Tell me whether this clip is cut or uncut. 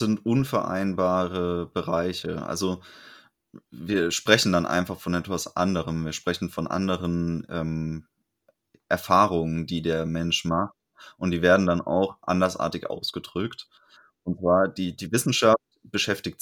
uncut